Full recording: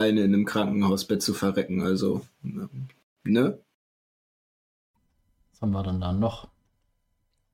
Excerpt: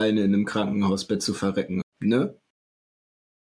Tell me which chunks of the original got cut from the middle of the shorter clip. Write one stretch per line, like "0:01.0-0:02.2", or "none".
0:01.8-0:03.1